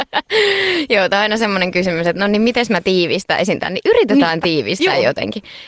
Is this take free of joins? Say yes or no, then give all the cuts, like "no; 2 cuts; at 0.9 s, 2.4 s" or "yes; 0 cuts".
yes; 0 cuts